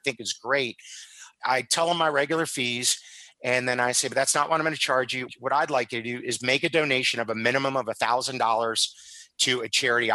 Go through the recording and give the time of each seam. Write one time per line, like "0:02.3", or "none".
none